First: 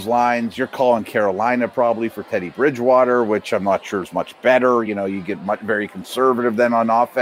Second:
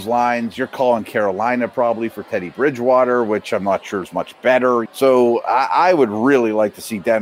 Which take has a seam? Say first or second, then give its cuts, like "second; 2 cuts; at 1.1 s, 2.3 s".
second; 1 cut; at 4.9 s